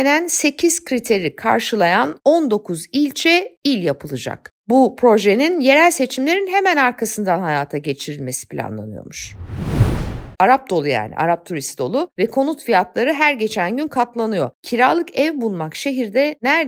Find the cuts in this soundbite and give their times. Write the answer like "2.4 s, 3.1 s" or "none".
10.3 s